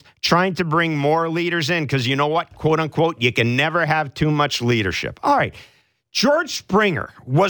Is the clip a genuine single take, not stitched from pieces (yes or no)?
yes